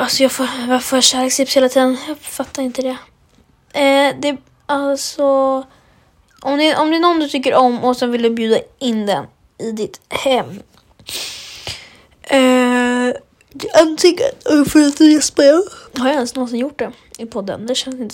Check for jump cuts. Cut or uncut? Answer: cut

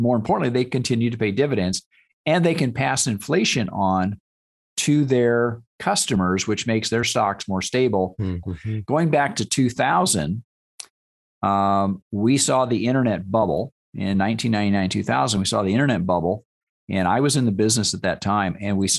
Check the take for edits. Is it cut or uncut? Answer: cut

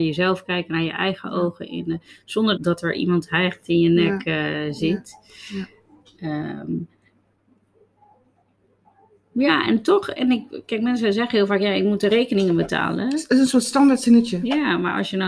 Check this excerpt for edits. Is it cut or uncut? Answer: cut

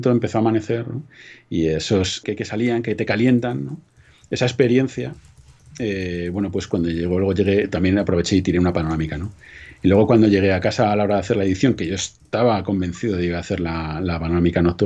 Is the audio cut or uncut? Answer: cut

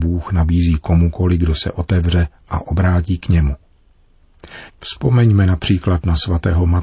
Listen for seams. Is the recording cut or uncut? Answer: cut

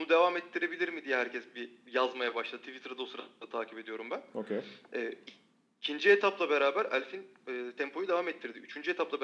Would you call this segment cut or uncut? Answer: uncut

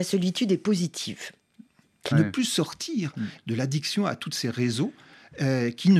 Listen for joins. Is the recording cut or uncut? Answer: cut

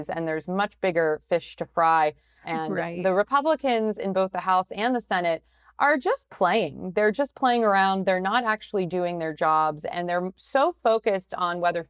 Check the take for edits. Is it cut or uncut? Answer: cut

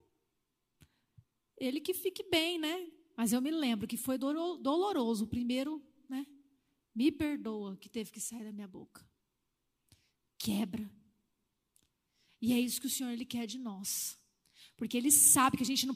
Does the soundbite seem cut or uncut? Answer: cut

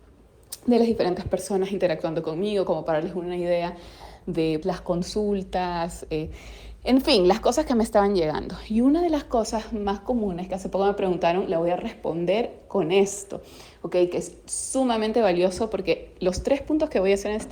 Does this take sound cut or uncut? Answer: cut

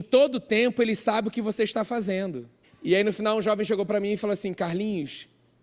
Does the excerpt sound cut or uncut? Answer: cut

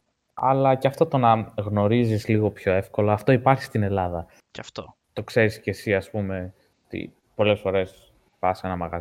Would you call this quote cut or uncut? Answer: cut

